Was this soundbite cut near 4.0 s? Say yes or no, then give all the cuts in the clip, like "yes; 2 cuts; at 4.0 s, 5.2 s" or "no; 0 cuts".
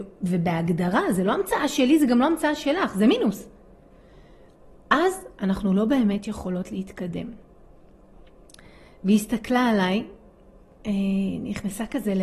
no; 0 cuts